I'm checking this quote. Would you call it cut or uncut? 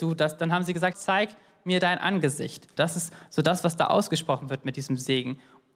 cut